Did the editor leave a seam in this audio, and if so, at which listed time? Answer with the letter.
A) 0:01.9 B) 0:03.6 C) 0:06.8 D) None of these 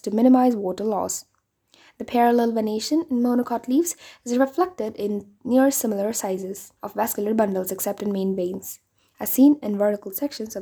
C